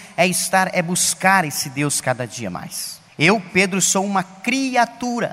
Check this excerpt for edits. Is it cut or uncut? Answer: cut